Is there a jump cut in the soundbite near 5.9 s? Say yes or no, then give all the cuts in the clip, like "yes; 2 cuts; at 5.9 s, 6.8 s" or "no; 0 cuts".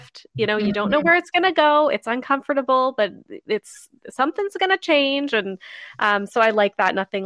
no; 0 cuts